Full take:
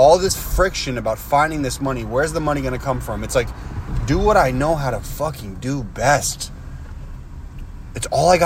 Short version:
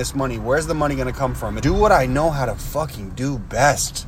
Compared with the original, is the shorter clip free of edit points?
no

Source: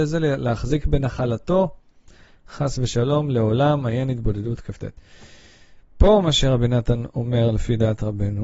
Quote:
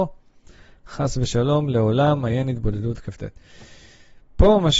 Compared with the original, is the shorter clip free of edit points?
yes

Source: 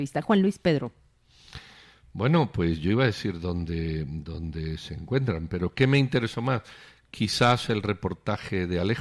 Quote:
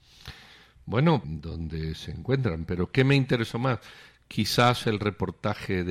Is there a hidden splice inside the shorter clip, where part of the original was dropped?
yes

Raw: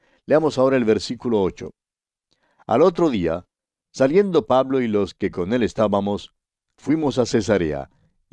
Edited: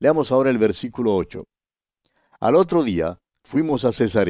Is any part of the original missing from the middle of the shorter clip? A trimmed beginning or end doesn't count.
yes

